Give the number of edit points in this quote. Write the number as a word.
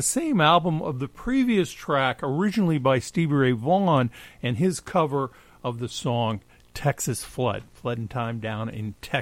zero